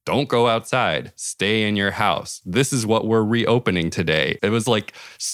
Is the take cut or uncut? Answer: cut